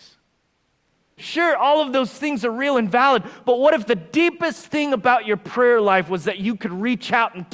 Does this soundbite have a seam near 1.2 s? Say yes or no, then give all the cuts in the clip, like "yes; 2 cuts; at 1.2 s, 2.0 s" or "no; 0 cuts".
yes; 1 cut; at 1.2 s